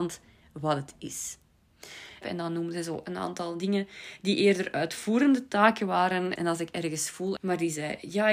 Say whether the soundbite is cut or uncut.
cut